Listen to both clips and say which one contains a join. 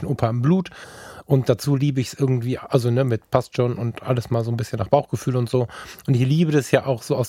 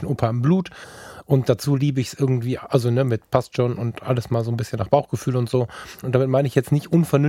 second; 1 cut; at 6.0 s

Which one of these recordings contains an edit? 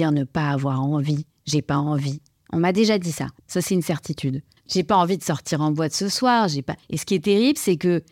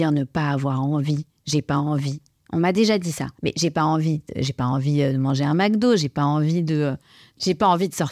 first; 3 cuts; at 3.4 s, 4.6 s, 6.8 s

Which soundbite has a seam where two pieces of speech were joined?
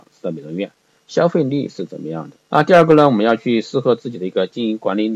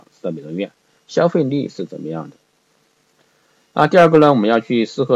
first; 1 cut; at 2.4 s

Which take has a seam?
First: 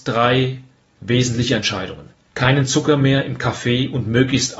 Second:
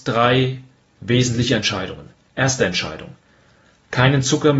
first; 1 cut; at 2.3 s

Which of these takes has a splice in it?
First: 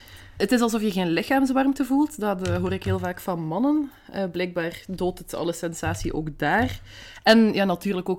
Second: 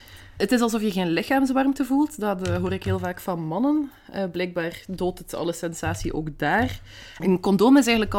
second; 1 cut; at 7.2 s

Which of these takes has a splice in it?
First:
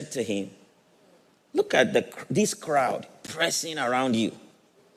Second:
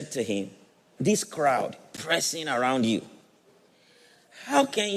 second; 1 cut; at 1.0 s

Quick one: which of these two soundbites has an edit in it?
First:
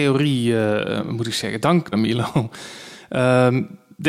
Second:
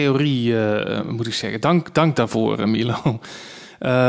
first; 1 cut; at 1.9 s

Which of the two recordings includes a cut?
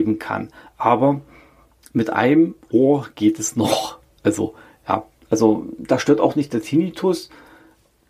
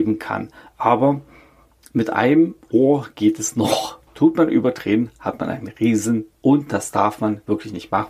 second; 2 cuts; at 4.1 s, 6.3 s

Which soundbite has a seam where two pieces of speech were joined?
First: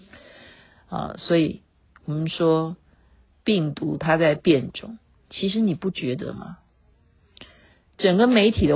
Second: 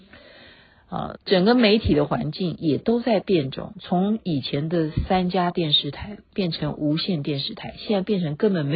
second; 1 cut; at 1.2 s

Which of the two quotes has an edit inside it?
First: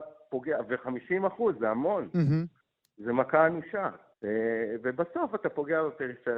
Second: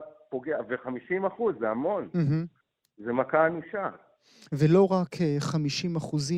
first; 1 cut; at 4.1 s

